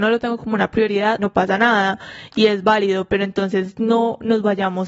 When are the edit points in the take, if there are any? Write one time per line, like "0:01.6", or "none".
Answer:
0:01.2

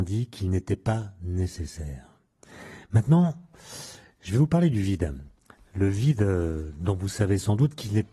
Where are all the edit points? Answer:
none

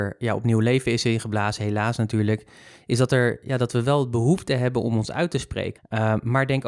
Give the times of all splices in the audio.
0:05.7

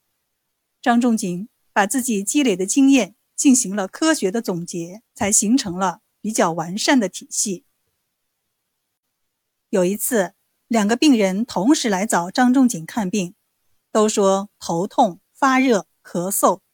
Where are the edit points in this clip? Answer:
0:05.1

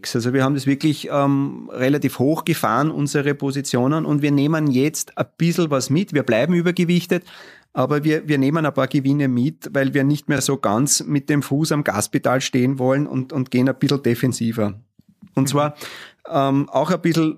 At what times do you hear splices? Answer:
none

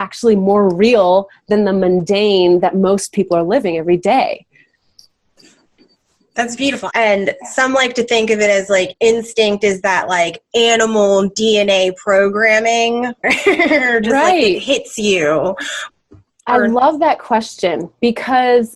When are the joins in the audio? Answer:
0:06.9
0:13.2

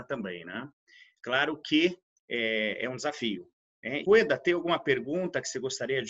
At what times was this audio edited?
0:04.0

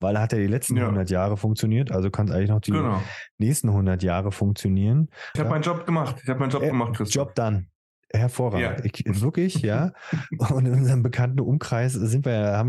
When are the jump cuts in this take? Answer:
0:05.4

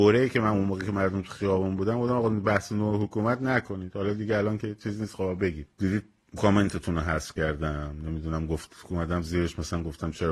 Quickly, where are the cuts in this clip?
0:05.7

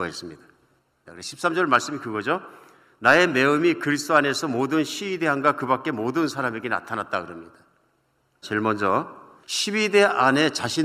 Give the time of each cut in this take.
0:01.1
0:08.4

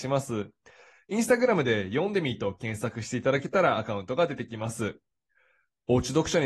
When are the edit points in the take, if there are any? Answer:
none

